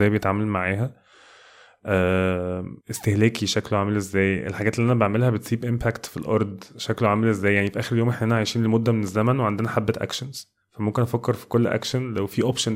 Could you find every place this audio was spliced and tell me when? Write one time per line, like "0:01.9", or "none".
0:02.8
0:10.6